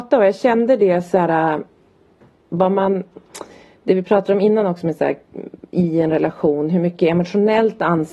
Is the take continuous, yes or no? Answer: yes